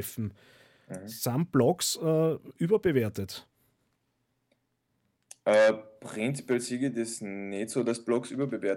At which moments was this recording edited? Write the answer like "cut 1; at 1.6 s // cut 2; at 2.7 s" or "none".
none